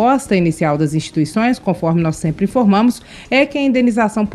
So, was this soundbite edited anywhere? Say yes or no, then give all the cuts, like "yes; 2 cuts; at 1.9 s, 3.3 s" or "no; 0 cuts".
no; 0 cuts